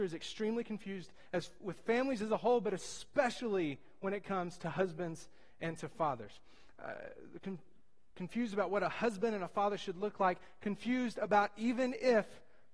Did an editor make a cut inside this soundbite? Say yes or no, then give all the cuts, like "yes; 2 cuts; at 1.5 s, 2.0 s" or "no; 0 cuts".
no; 0 cuts